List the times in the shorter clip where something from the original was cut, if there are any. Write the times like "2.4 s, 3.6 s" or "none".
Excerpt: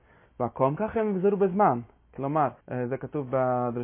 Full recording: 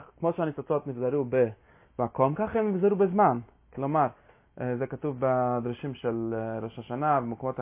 2.6 s

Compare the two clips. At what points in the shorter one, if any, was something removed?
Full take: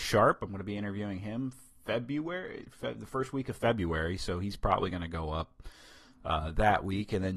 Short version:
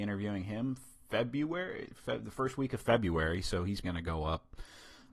3.8 s

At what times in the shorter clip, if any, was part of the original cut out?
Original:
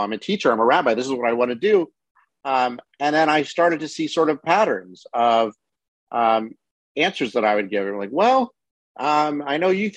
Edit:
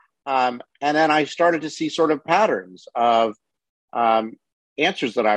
none

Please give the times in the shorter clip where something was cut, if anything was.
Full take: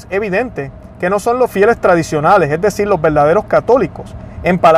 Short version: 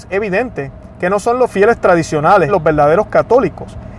2.5 s

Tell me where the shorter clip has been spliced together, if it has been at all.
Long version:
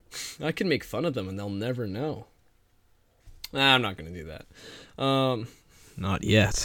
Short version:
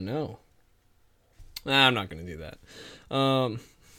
none

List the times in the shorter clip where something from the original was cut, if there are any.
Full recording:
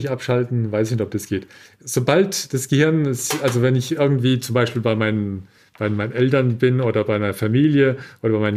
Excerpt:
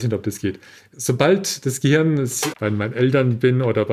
2.5 s

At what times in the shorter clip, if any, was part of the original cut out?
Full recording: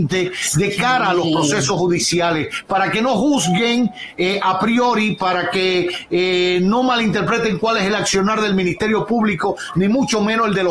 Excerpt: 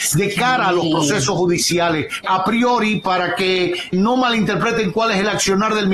2.2 s, 3.9 s

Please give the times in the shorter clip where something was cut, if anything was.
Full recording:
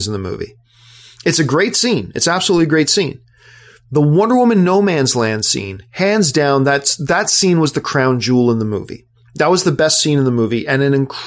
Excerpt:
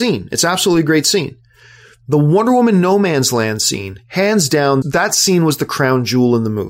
4.8 s

